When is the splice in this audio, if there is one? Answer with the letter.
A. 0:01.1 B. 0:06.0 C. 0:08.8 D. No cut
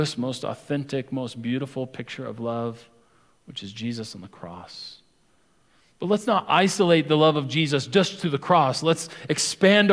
D